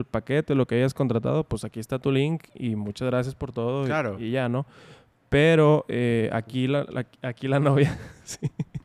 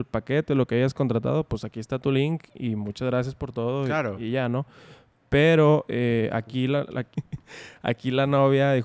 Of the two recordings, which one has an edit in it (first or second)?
second